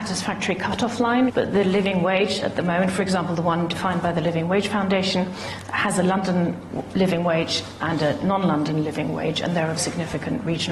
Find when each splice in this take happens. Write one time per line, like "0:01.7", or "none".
0:01.3
0:09.8